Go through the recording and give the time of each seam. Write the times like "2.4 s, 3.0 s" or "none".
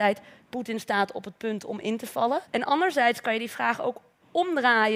2.4 s